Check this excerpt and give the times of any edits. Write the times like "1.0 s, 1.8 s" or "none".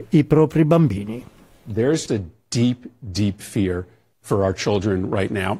2.1 s